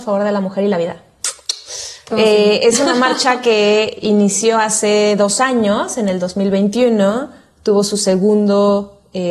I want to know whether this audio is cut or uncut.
uncut